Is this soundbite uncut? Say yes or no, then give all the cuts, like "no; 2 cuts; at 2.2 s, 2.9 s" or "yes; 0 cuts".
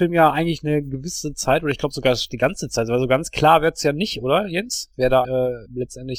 no; 1 cut; at 5.2 s